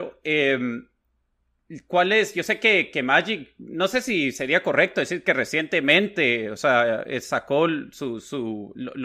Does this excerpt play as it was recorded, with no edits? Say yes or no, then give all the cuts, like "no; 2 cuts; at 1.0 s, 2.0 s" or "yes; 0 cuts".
yes; 0 cuts